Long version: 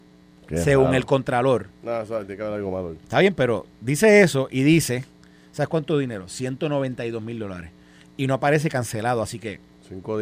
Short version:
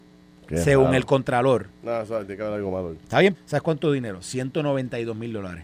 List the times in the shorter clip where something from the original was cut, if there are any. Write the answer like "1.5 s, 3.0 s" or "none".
3.3 s